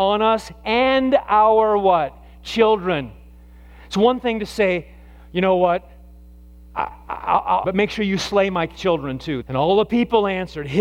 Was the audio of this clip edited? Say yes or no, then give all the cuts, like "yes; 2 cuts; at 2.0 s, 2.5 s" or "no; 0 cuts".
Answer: yes; 2 cuts; at 7.6 s, 9.4 s